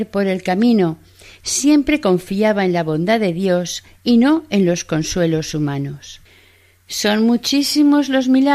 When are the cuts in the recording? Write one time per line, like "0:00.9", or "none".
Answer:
none